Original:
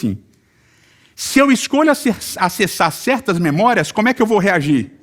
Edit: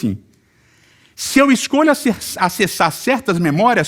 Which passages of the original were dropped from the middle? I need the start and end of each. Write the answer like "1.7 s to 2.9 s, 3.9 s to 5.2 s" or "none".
none